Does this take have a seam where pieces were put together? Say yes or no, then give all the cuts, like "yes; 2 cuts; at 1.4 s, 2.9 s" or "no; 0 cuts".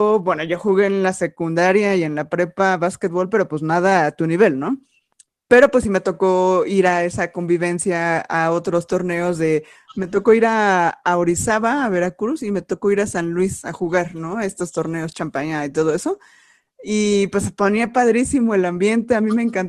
no; 0 cuts